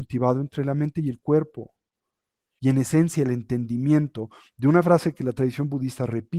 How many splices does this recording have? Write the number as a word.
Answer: one